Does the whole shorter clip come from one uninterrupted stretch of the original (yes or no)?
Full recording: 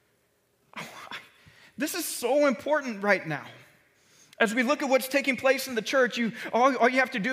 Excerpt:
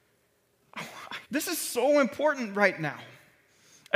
no